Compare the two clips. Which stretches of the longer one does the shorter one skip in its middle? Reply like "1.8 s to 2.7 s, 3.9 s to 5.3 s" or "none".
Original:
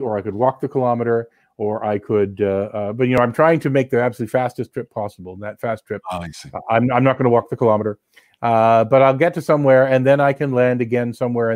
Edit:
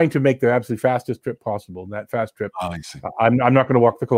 none